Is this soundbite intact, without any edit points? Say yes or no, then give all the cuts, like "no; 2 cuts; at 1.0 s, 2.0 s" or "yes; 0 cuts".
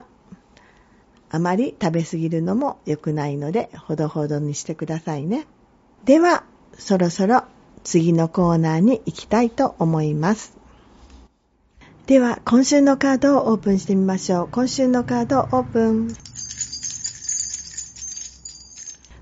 no; 1 cut; at 6.0 s